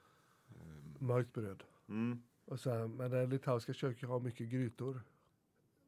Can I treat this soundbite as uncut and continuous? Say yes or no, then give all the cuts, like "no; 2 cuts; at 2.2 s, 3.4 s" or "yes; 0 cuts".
yes; 0 cuts